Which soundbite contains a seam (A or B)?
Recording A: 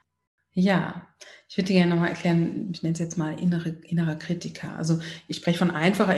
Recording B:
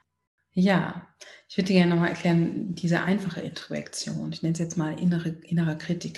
A